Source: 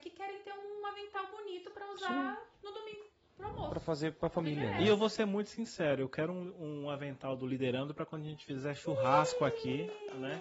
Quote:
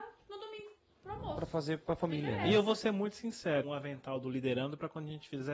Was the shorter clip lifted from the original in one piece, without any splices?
no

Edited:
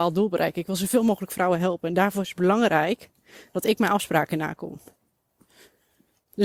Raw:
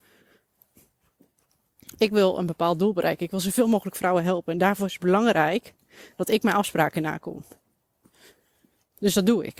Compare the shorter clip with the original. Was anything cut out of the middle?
no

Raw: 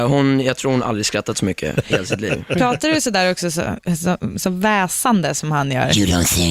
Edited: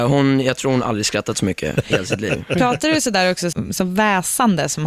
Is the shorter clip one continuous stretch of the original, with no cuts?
no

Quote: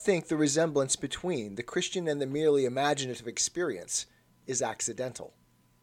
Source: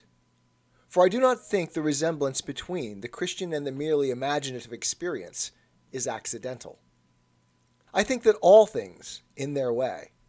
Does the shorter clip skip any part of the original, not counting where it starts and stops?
no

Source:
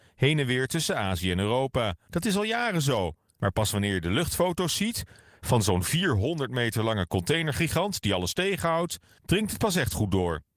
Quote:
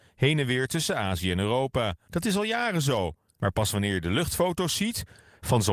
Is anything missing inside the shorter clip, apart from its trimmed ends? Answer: no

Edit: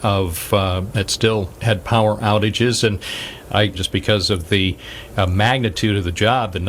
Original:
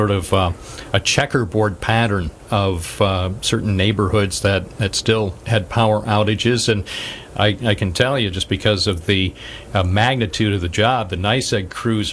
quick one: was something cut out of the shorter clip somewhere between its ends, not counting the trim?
yes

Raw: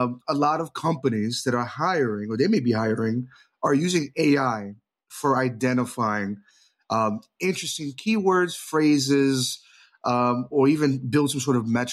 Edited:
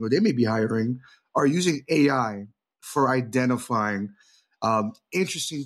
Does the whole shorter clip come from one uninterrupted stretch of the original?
yes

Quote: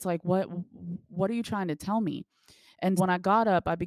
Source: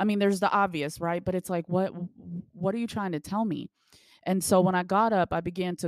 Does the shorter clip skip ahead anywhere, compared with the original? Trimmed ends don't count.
yes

